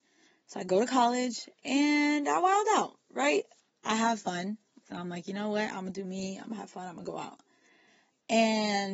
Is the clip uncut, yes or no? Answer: no